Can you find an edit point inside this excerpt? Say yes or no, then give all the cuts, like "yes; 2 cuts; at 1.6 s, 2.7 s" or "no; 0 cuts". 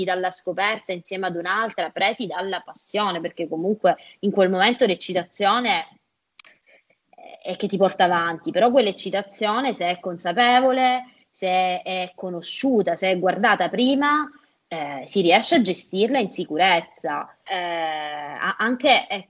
yes; 1 cut; at 17.5 s